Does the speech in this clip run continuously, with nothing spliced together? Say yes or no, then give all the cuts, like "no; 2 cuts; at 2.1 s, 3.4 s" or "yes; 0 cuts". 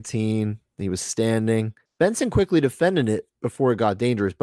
yes; 0 cuts